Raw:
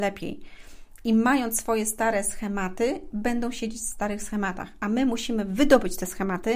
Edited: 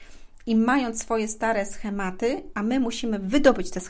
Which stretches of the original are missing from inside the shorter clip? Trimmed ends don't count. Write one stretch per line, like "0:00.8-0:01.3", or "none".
0:03.1-0:04.8